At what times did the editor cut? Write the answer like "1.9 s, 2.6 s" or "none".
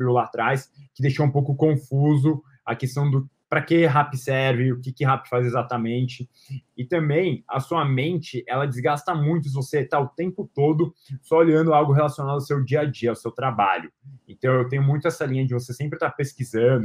6.6 s